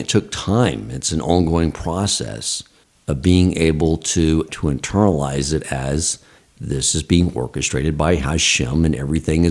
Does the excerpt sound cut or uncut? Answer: cut